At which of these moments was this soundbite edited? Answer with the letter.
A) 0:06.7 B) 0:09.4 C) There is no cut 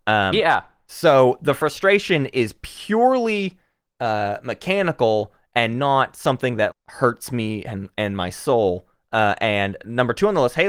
A